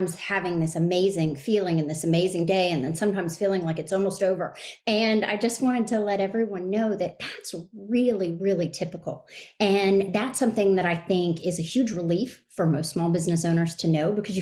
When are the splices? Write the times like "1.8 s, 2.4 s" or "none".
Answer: 4.8 s